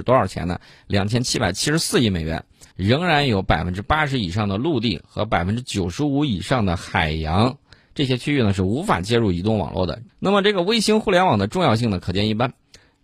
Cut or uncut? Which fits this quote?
cut